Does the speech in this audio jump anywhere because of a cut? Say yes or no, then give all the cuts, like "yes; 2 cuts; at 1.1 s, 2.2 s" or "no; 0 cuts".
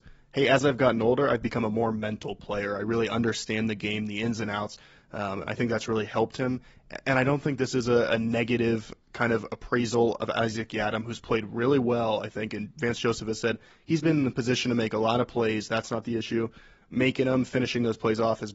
no; 0 cuts